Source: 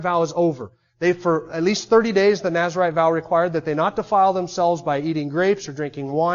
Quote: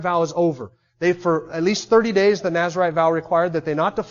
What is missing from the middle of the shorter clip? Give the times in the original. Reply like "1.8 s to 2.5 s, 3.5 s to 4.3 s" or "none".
none